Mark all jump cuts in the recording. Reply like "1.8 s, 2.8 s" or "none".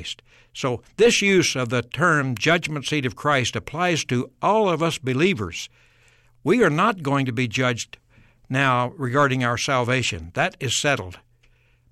none